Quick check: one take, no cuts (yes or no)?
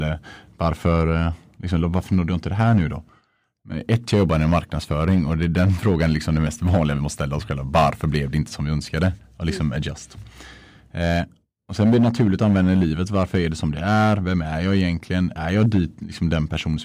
yes